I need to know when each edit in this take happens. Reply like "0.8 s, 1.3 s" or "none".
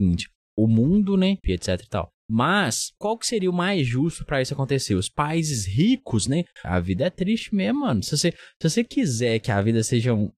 1.4 s, 6.6 s